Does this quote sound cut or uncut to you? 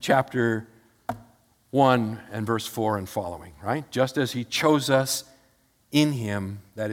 uncut